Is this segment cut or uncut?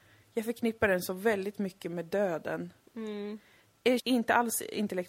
cut